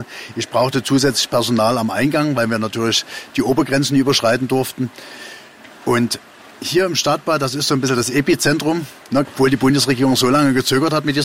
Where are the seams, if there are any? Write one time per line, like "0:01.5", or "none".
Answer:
0:05.7
0:09.2